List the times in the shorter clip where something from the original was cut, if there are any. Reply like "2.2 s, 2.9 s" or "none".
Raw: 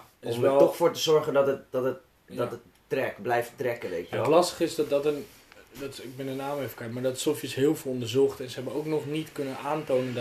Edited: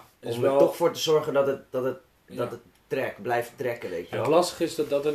none